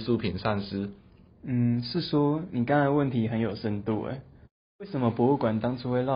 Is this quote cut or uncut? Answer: cut